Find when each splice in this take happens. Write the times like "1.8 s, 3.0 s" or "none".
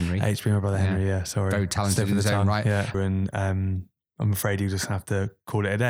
2.9 s